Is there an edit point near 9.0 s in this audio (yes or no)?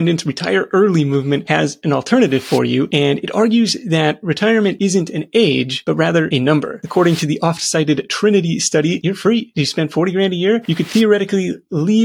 yes